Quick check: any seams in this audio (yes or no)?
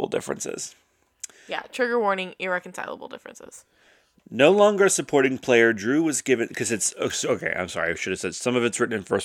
no